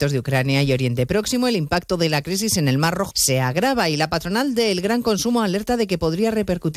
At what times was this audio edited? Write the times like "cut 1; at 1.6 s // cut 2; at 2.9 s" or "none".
cut 1; at 3.1 s